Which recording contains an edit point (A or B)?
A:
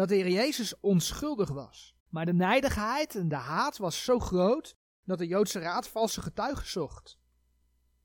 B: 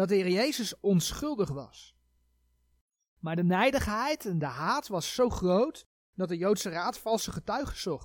A